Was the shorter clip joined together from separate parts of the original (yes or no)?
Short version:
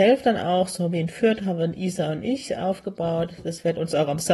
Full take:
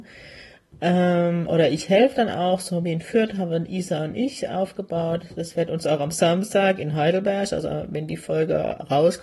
no